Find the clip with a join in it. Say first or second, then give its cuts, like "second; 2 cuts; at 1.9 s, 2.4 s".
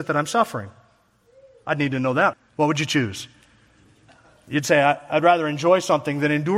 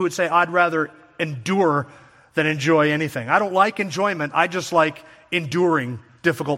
first; 1 cut; at 2.3 s